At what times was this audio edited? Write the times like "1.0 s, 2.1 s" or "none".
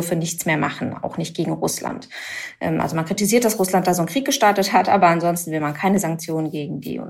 none